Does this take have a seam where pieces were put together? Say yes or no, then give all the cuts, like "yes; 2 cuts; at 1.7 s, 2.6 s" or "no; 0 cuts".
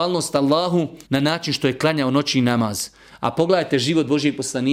yes; 1 cut; at 1.0 s